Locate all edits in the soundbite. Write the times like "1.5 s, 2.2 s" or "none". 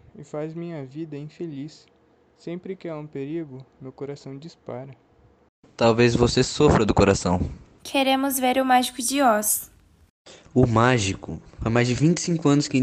7.8 s